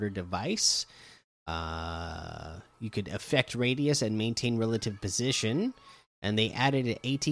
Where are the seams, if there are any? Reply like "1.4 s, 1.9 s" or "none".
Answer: 6.1 s

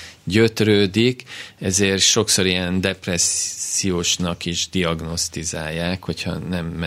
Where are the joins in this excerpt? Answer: none

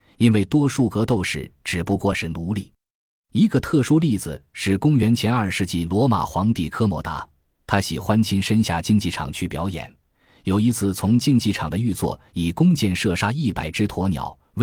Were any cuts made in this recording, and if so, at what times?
none

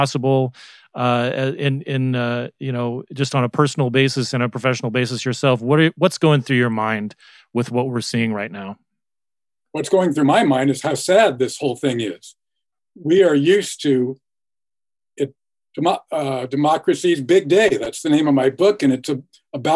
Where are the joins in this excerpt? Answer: none

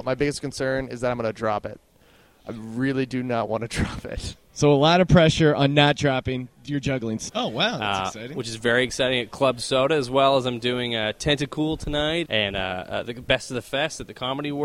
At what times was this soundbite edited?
7.3 s, 12.3 s

